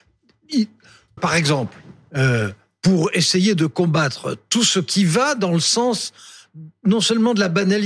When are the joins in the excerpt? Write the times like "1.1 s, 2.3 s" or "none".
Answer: 1.2 s